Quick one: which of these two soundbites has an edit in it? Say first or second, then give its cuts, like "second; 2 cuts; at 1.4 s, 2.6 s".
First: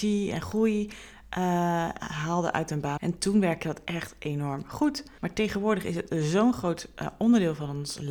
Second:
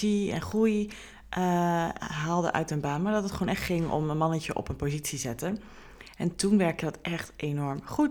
first; 2 cuts; at 3.0 s, 5.2 s